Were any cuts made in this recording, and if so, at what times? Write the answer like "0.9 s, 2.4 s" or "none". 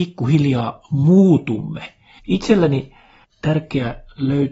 2.2 s